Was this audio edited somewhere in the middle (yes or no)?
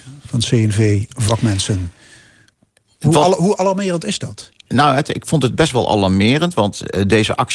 no